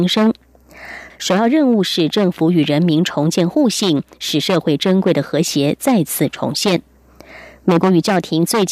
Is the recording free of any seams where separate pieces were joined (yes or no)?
no